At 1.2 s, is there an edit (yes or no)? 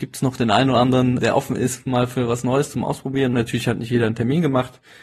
yes